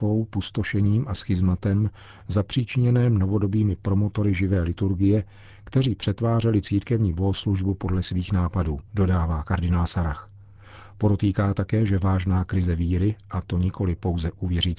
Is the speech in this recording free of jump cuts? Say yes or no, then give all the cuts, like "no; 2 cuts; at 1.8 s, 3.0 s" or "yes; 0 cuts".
no; 1 cut; at 8.9 s